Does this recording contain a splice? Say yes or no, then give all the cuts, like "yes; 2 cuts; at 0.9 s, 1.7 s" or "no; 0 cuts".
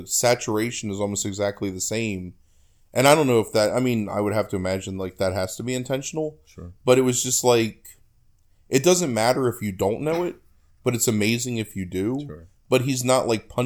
no; 0 cuts